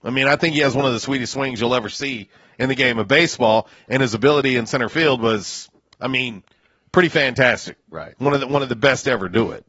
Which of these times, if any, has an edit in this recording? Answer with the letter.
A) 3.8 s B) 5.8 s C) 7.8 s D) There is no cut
D